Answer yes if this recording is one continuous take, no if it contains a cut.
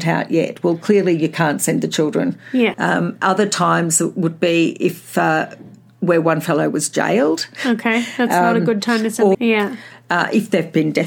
no